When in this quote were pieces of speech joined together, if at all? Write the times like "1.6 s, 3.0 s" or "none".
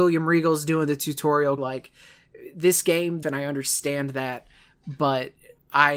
1.6 s, 3.2 s